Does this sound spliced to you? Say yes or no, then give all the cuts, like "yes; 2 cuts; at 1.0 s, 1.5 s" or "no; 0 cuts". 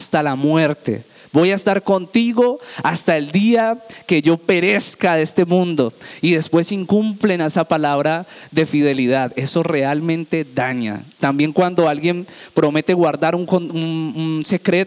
no; 0 cuts